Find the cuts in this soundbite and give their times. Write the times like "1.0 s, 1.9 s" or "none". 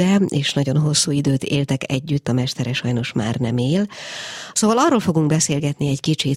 4.5 s